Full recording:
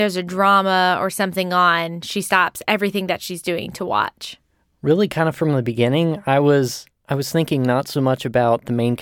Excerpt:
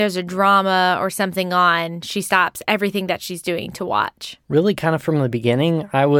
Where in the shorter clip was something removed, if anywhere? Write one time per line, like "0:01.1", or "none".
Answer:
0:04.4